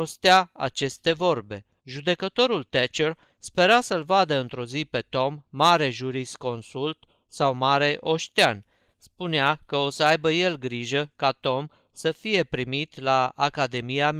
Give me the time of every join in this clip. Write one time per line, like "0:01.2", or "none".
0:01.8